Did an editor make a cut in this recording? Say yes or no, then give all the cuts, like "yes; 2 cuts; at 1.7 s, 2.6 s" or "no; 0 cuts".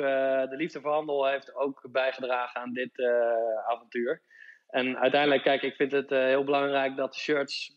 no; 0 cuts